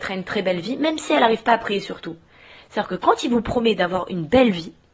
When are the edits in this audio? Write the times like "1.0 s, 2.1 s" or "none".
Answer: 2.6 s